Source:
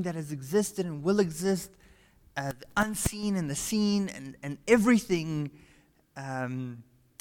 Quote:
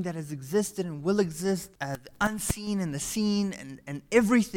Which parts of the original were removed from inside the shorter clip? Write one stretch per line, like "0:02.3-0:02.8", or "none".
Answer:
0:01.8-0:02.3